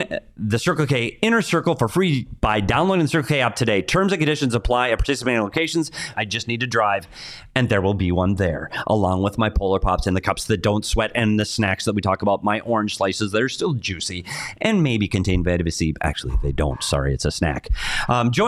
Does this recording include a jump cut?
yes; 1 cut; at 6.1 s

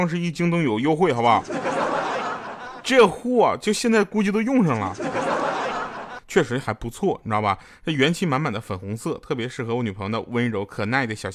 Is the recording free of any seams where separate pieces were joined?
no; 1 cut; at 6.2 s

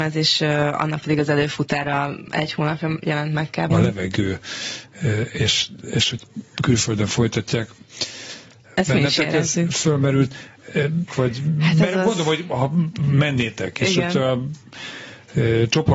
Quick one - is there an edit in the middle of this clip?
yes; 2 cuts; at 3.7 s, 11.1 s

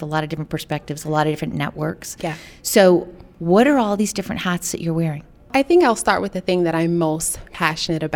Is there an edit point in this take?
no; 0 cuts

